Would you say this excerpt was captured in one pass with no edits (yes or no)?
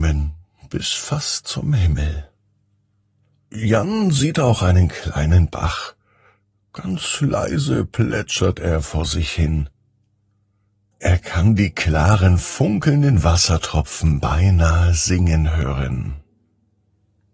yes